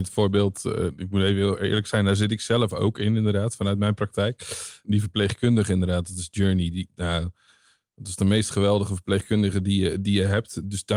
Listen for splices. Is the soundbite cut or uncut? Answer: uncut